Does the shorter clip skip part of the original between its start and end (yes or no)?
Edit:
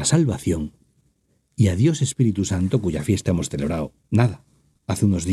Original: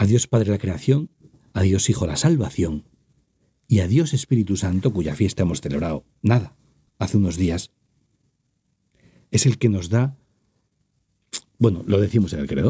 no